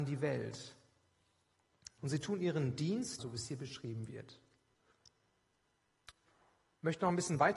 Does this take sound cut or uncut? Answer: cut